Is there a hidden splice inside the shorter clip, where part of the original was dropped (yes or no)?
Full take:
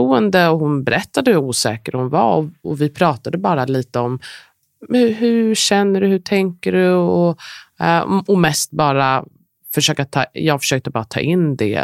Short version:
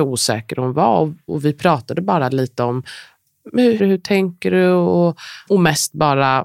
yes